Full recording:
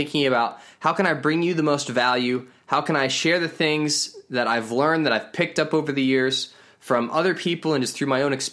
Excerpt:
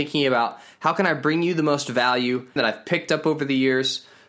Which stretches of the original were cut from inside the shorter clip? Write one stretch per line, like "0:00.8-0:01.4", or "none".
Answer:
0:02.6-0:05.0